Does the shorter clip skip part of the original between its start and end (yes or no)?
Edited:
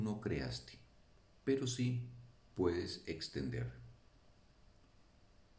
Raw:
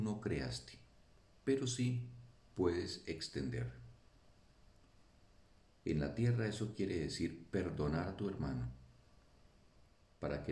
no